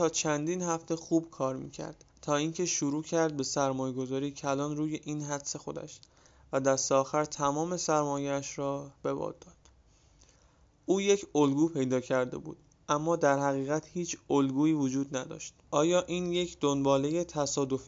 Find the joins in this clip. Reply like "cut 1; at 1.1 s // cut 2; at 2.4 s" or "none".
cut 1; at 2.1 s // cut 2; at 15.6 s